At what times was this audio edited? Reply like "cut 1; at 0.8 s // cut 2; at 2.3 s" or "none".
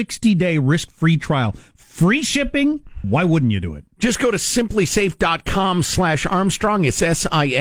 cut 1; at 3.0 s